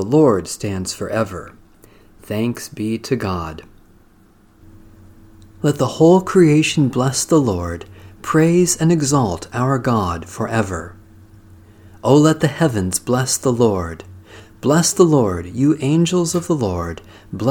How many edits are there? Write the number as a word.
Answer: zero